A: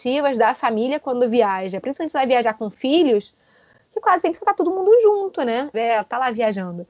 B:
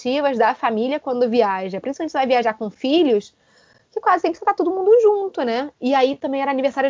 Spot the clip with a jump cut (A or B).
A